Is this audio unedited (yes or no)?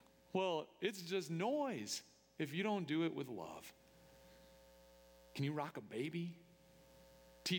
yes